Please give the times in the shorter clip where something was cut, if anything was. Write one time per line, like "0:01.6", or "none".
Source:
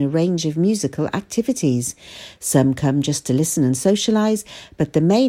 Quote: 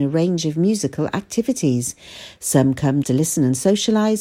0:03.0